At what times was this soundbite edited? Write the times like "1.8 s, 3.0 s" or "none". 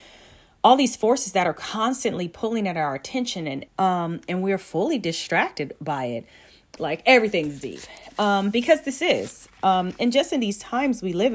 3.7 s, 6.8 s